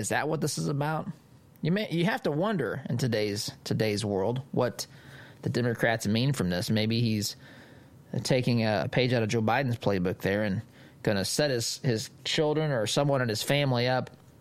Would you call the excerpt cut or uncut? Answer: cut